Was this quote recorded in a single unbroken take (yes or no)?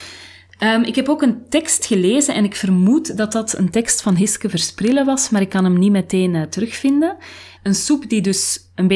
no